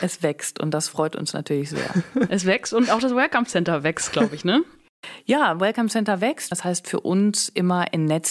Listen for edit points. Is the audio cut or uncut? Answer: cut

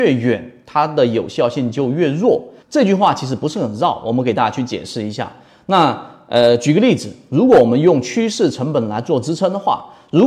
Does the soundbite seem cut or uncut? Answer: cut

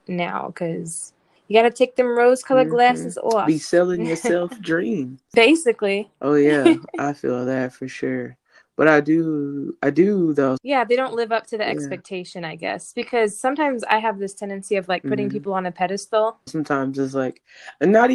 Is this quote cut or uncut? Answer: cut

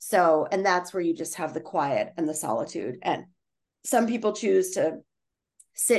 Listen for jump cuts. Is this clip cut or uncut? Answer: uncut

